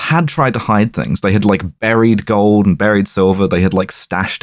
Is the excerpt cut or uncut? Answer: uncut